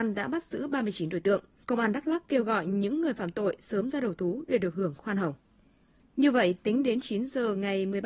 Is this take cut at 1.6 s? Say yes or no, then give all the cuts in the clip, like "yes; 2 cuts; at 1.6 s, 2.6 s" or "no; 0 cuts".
yes; 2 cuts; at 1.6 s, 6.0 s